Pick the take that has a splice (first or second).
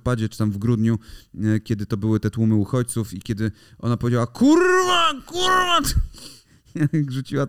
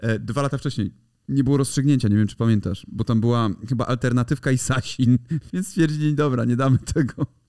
second